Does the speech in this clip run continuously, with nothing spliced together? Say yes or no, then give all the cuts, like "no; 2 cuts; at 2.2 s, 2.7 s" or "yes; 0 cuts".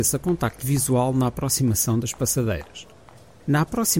yes; 0 cuts